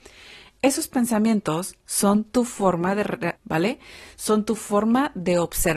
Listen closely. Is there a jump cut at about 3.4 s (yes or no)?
yes